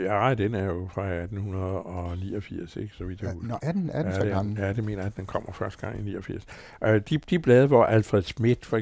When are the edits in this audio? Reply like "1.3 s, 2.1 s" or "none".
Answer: none